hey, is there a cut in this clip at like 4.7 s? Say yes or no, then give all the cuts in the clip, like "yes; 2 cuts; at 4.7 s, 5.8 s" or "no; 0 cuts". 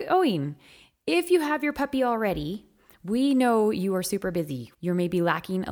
yes; 1 cut; at 4.7 s